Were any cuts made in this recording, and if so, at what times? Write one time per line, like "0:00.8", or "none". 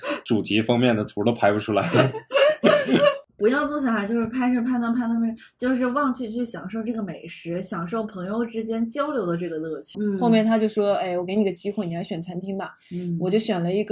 0:09.9